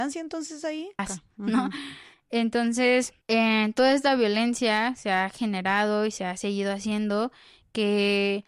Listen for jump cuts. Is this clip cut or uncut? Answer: cut